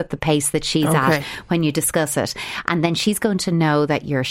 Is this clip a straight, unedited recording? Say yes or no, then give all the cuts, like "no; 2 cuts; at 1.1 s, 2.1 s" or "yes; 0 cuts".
yes; 0 cuts